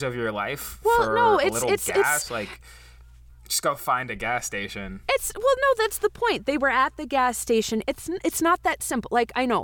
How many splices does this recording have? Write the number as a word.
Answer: one